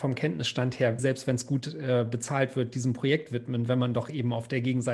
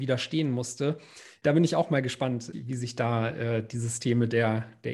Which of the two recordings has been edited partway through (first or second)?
first